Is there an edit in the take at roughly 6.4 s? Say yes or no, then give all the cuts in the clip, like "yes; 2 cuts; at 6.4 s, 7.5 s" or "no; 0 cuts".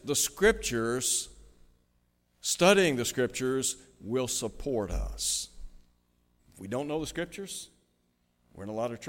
yes; 1 cut; at 6.4 s